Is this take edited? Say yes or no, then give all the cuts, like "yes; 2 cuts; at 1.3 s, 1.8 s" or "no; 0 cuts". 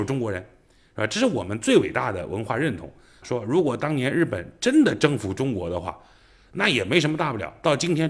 yes; 1 cut; at 3.2 s